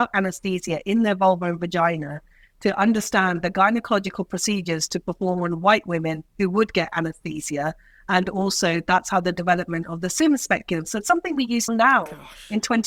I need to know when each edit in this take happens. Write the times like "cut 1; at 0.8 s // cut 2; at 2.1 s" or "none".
cut 1; at 11.7 s